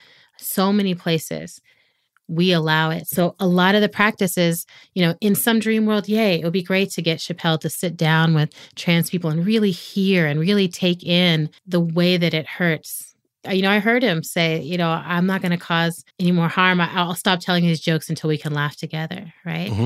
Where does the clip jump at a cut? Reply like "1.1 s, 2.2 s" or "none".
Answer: 11.6 s, 16.1 s